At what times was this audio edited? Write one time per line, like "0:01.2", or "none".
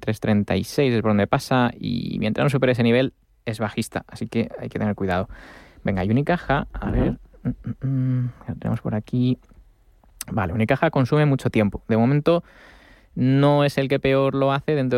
none